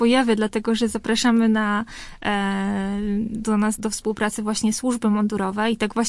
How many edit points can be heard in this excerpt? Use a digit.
1